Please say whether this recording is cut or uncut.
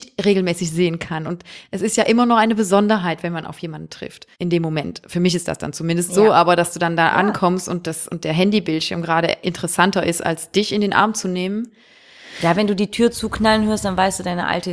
cut